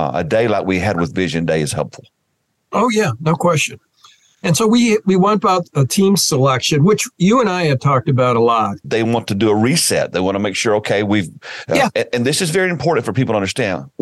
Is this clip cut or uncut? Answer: cut